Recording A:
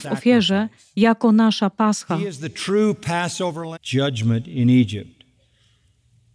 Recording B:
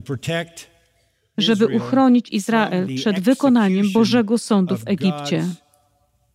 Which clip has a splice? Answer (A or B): A